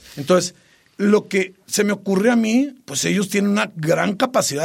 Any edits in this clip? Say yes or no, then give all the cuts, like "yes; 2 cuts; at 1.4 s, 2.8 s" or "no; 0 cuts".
no; 0 cuts